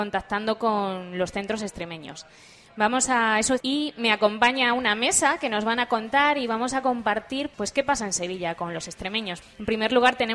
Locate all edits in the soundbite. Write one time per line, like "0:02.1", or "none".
0:03.6
0:07.5
0:09.4